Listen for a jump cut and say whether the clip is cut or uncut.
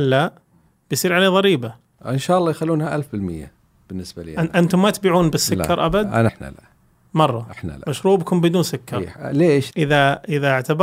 cut